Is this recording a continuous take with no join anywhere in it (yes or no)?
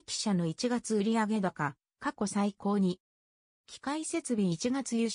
yes